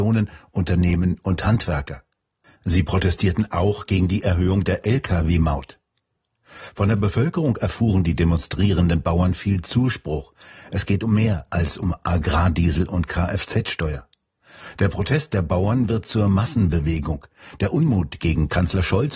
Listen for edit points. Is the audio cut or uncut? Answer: uncut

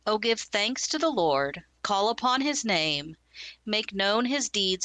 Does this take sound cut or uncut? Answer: uncut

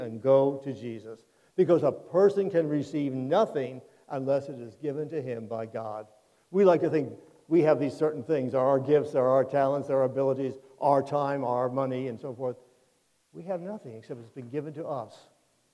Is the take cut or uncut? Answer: uncut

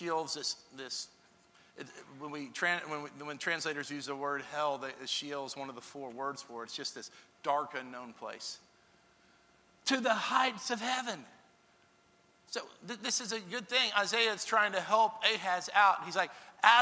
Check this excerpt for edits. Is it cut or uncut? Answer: uncut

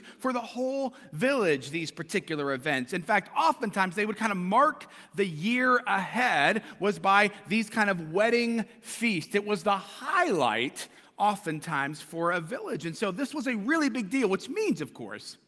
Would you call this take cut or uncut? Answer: uncut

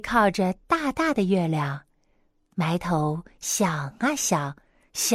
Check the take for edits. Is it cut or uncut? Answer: uncut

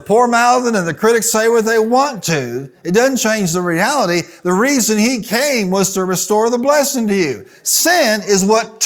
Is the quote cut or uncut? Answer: uncut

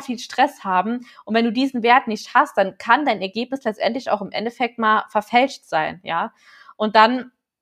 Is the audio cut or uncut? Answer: uncut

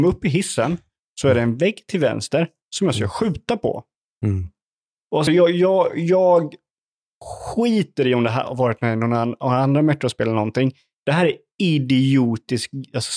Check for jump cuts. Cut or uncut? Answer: uncut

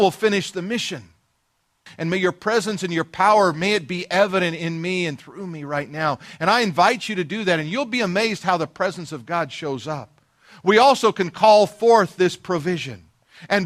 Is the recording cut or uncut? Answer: cut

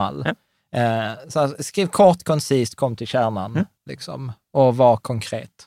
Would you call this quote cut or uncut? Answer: uncut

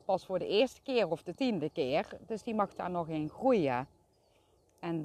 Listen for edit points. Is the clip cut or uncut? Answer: uncut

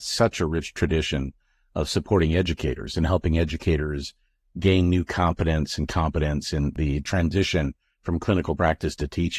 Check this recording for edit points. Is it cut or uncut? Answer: uncut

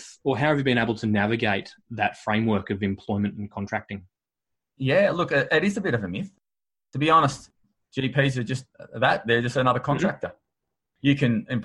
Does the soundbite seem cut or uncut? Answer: uncut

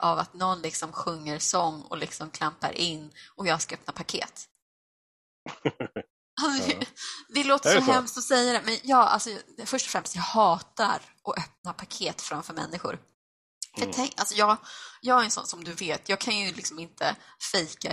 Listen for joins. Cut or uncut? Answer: uncut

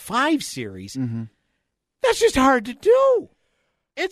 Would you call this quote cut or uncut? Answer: uncut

